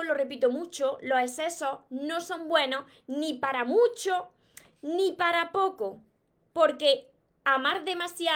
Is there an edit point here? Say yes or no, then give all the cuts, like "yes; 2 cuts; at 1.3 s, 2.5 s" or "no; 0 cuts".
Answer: no; 0 cuts